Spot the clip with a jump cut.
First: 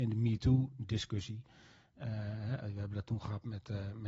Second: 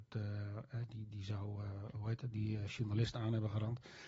second; 1 cut; at 2.3 s

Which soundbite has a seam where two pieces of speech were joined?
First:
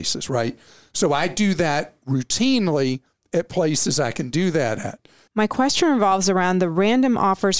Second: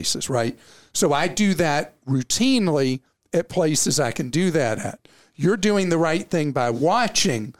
first; 1 cut; at 5.3 s

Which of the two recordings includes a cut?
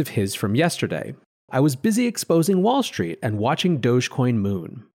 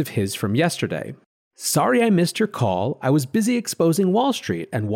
first; 1 cut; at 1.5 s

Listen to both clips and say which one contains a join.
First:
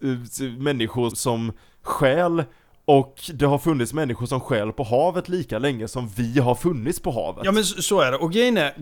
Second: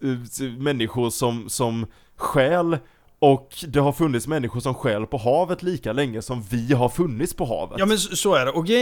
first; 1 cut; at 1.1 s

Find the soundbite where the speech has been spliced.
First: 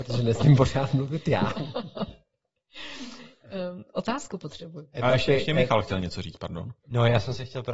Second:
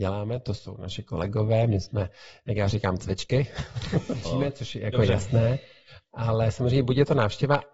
second; 1 cut; at 4.2 s

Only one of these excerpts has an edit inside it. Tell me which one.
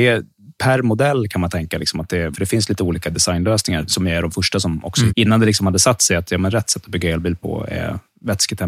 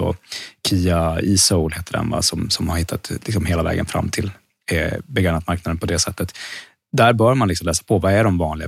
first; 3 cuts; at 2.3 s, 3.9 s, 5.1 s

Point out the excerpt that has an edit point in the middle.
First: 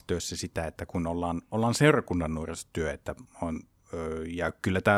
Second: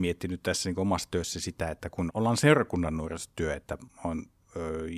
second; 1 cut; at 2.1 s

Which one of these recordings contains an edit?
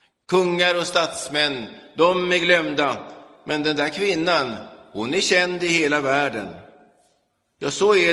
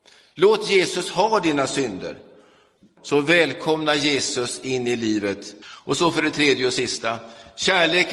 second; 2 cuts; at 3.0 s, 5.6 s

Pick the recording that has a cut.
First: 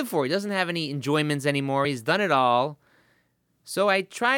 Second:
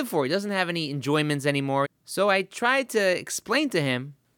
second; 1 cut; at 1.8 s

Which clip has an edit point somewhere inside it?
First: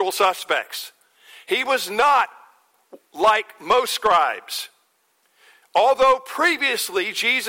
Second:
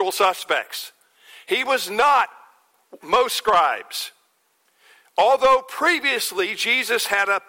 second; 1 cut; at 3.0 s

